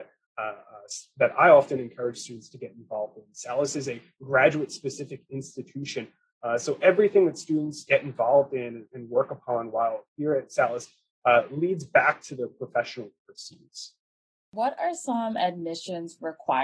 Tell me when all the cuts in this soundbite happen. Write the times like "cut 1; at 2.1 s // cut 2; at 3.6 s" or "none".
none

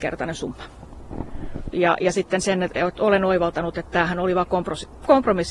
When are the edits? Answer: cut 1; at 1.7 s

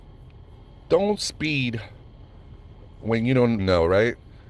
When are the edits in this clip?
cut 1; at 3.6 s

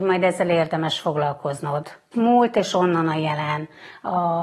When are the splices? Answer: cut 1; at 2.1 s

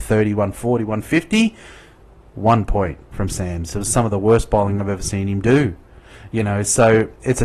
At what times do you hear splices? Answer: none

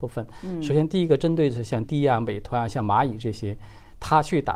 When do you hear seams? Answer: cut 1; at 1.9 s

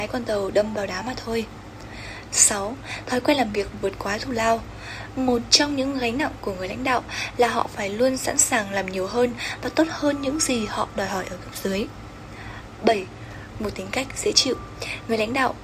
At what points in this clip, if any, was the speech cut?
none

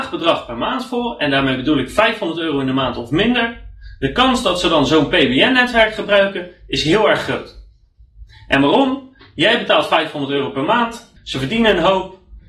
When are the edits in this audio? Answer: cut 1; at 11.2 s

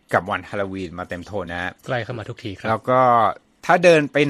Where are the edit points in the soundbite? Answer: cut 1; at 1.5 s

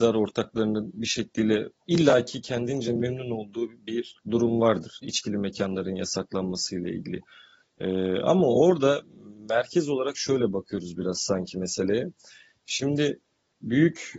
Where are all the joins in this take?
none

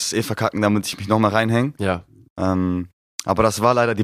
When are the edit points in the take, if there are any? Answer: none

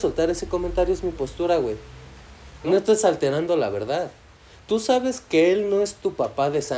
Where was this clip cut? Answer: cut 1; at 2.6 s

